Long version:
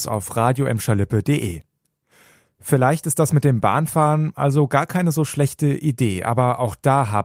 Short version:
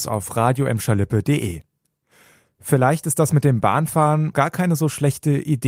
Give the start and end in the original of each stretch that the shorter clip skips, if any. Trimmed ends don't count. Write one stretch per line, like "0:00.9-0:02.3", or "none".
0:04.3-0:04.7